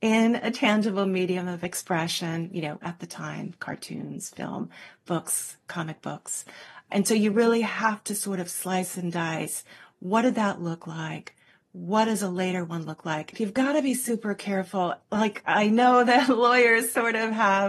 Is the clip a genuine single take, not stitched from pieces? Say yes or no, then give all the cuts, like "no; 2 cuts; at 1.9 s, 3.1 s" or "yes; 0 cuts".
no; 1 cut; at 13.3 s